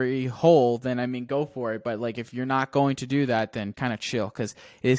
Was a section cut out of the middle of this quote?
yes; 1 cut; at 3.7 s

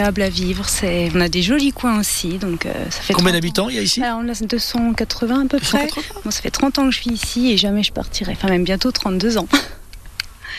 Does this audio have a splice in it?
no; 0 cuts

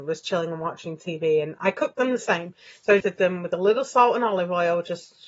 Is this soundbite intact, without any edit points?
no; 1 cut; at 3.0 s

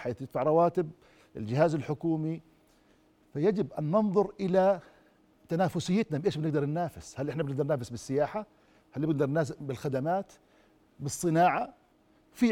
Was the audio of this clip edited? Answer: no; 0 cuts

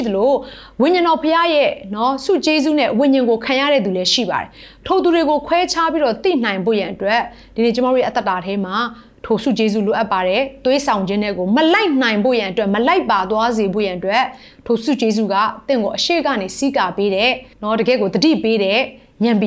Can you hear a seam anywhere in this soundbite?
yes; 1 cut; at 17.5 s

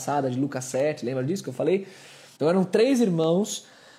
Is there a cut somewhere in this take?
yes; 1 cut; at 2.4 s

